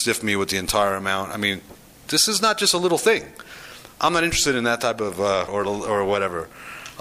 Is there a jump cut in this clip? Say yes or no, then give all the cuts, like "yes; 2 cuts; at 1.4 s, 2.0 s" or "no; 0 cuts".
yes; 1 cut; at 5.5 s